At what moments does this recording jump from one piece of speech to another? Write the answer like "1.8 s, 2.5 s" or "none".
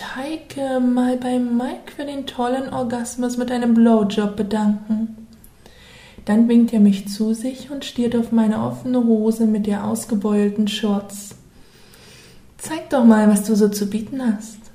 none